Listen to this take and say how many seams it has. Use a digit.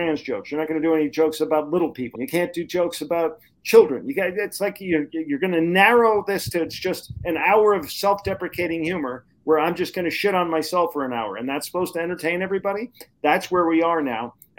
1